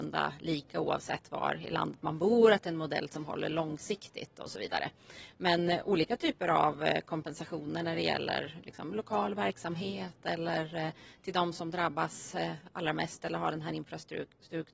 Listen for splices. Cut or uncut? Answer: uncut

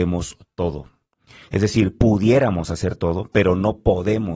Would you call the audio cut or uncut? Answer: cut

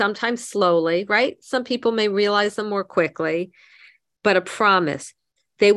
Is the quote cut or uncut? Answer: uncut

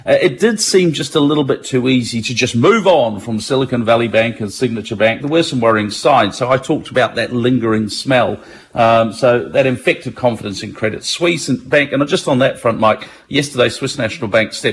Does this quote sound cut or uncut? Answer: cut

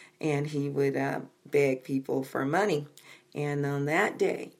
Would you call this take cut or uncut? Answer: uncut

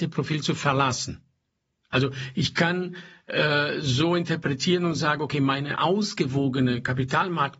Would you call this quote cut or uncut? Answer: uncut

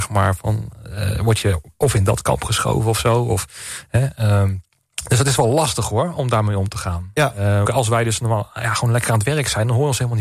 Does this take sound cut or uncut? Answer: cut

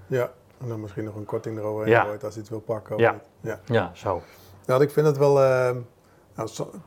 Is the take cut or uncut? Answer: cut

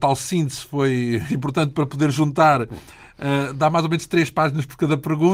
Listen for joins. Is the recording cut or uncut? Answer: cut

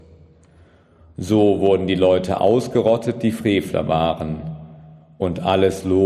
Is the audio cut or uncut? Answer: uncut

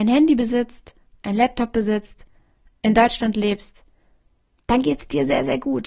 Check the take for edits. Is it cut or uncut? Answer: uncut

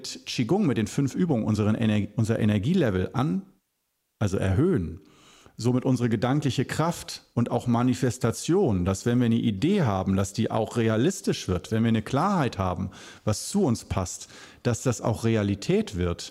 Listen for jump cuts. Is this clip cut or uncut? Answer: uncut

